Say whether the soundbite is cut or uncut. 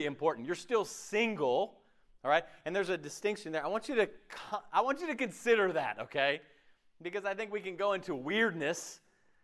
uncut